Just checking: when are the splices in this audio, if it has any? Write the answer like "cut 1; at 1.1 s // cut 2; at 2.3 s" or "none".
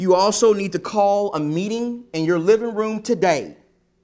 none